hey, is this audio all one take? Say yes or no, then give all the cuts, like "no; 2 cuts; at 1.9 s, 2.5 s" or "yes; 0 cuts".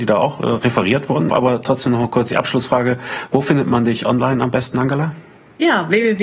no; 1 cut; at 1.3 s